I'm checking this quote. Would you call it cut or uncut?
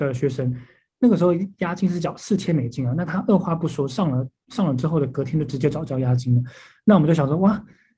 uncut